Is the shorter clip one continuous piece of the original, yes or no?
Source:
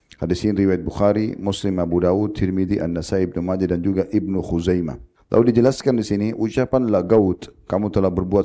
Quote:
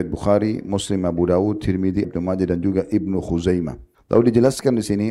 no